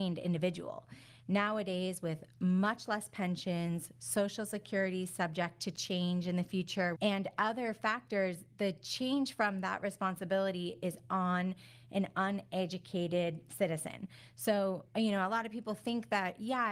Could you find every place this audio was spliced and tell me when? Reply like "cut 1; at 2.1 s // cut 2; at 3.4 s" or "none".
cut 1; at 7.0 s